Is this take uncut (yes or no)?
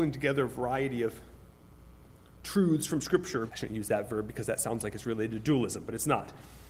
no